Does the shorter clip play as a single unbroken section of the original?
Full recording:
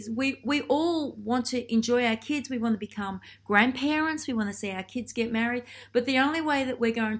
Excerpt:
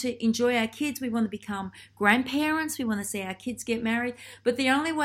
yes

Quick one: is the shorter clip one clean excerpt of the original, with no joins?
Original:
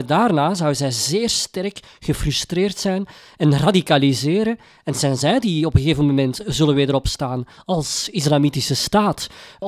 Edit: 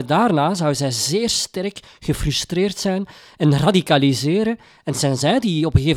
yes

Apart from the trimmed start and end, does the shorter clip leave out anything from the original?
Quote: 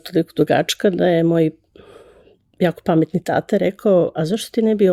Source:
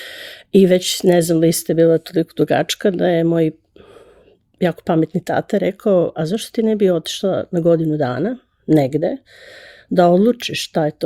no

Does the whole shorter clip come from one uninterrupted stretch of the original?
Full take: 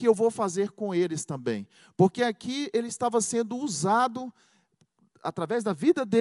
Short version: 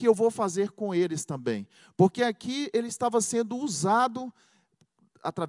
yes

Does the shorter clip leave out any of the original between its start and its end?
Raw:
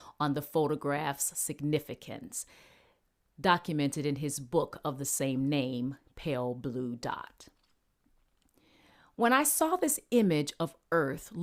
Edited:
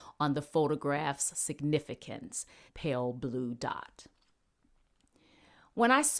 yes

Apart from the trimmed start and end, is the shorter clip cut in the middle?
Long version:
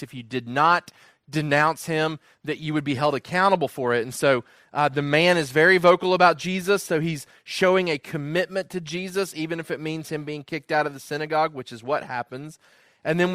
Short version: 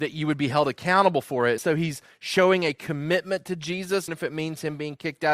yes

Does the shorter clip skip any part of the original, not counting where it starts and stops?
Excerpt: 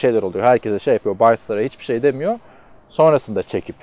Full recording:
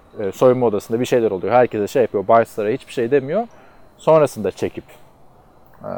no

